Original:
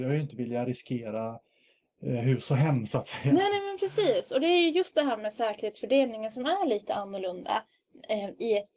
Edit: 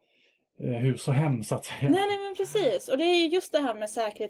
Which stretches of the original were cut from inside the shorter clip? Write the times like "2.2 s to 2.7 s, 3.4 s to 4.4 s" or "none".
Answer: none

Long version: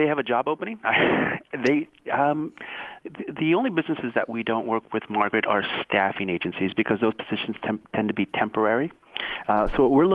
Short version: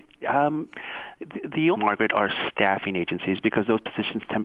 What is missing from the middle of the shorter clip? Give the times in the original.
3.6 s to 5.1 s

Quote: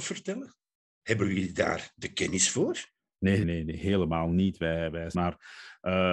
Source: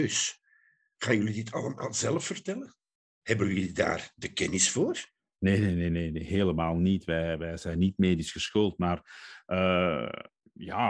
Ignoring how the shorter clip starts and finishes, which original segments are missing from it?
5.6 s to 5.9 s, 7.6 s to 8.8 s

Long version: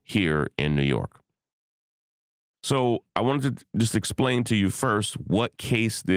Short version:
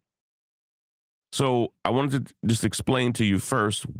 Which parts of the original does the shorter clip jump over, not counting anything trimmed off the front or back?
none

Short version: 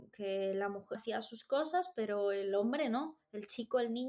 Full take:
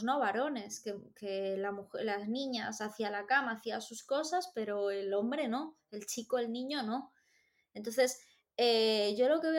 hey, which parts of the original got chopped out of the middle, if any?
2.0 s to 3.5 s

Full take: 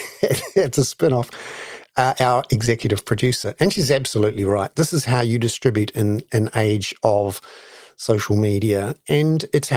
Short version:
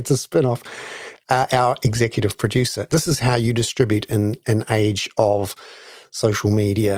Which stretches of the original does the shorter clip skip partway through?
3.6 s to 4.7 s

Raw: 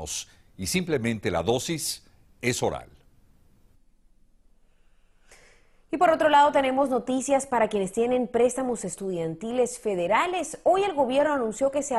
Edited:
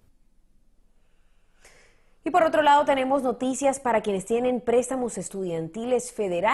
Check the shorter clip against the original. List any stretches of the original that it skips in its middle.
none

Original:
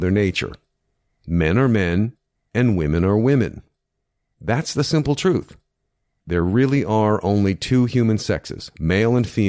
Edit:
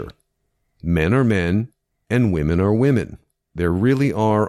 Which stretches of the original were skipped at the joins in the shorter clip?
3.9 s to 6.2 s

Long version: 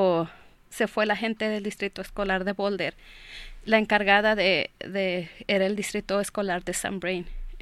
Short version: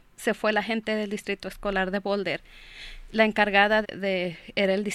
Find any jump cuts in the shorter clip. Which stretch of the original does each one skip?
4.4 s to 4.7 s

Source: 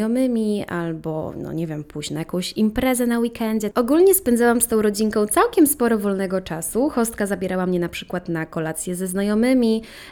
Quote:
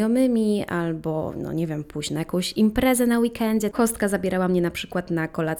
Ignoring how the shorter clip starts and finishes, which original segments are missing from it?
3.7 s to 6.9 s

